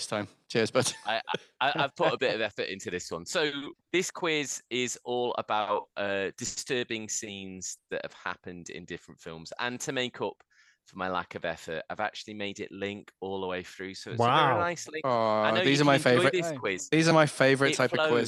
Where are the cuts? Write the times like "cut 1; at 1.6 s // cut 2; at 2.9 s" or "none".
cut 1; at 3.8 s